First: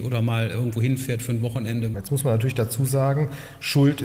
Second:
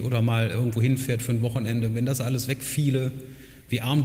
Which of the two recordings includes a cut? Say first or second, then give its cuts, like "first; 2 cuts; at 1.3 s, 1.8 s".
first; 1 cut; at 1.9 s